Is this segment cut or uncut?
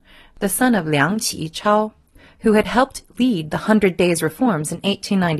uncut